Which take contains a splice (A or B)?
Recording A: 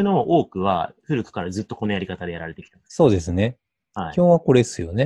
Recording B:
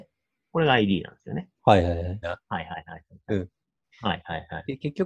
B